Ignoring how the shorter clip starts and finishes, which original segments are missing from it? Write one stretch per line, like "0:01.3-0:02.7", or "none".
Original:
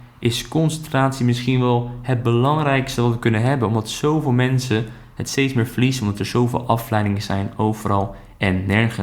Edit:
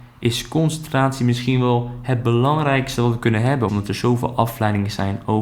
0:03.7-0:06.0